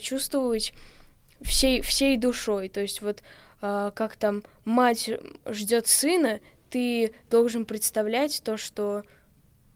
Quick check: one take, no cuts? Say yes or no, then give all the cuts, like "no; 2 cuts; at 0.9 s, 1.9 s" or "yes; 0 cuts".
yes; 0 cuts